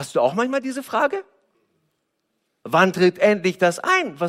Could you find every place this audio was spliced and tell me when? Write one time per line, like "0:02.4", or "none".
none